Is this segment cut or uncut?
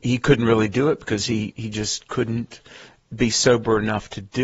uncut